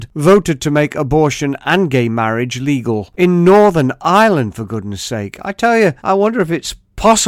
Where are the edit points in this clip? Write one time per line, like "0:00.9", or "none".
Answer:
0:06.0